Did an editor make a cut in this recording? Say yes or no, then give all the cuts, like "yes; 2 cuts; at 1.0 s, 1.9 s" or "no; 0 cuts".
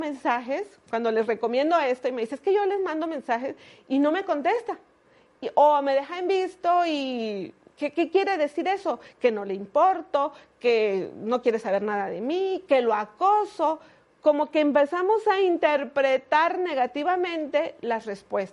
no; 0 cuts